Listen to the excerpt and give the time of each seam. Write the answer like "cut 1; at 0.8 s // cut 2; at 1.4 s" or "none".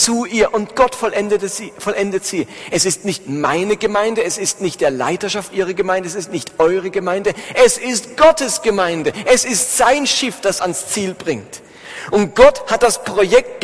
cut 1; at 10.6 s